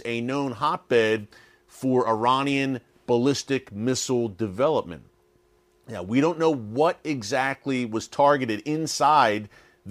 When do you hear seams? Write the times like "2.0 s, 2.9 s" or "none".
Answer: none